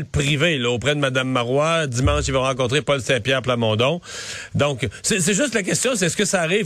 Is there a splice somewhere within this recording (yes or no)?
no